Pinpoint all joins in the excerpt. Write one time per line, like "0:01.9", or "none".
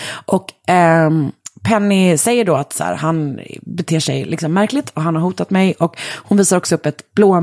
none